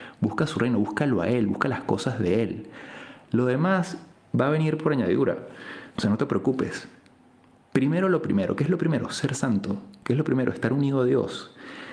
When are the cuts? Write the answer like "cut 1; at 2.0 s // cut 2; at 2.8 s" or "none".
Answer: cut 1; at 5.9 s